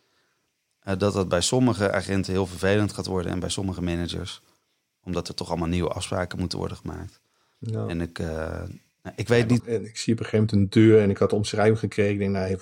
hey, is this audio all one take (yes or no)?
no